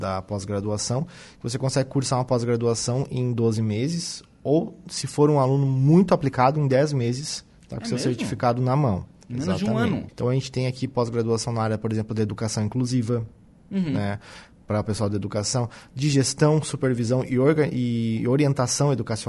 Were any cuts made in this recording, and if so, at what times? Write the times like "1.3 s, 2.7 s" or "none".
10.1 s